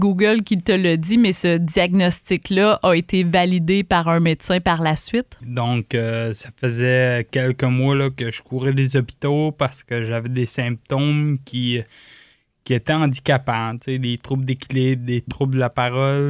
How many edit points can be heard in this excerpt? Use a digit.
1